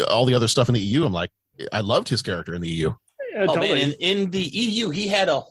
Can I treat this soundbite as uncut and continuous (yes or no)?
yes